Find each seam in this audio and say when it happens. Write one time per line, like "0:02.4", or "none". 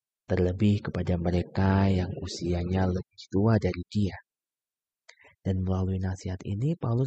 none